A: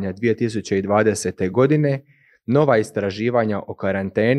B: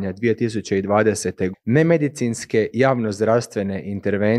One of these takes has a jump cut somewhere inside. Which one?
B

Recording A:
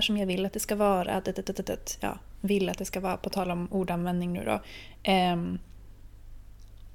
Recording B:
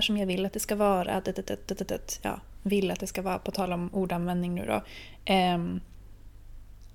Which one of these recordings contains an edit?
A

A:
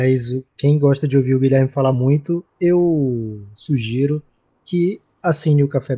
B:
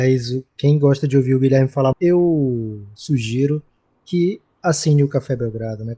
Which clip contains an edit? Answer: B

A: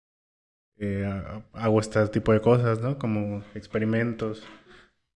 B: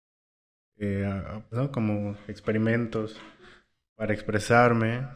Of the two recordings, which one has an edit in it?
B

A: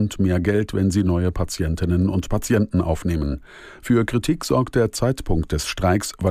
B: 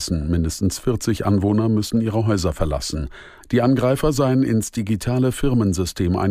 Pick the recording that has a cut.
B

